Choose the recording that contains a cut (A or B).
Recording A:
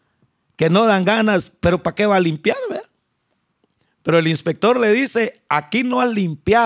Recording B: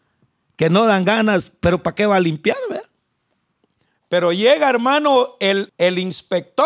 B